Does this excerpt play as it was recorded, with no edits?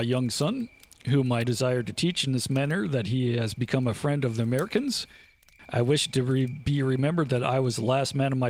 no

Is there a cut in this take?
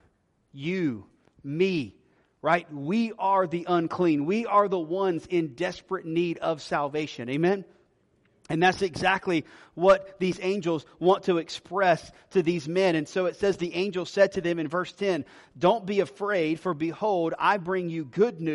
no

